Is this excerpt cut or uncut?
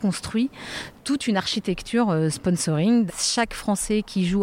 cut